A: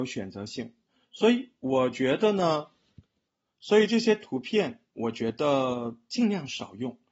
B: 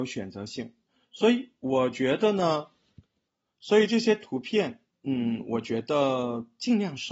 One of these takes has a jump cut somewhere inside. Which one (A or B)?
A